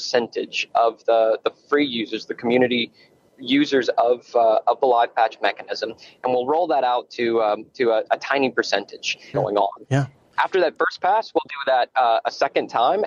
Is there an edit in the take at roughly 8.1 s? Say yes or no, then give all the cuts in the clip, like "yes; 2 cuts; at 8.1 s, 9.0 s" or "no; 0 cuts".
yes; 2 cuts; at 8.1 s, 9.3 s